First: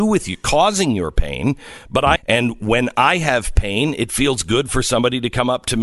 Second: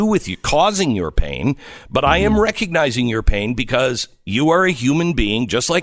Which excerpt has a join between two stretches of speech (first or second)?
first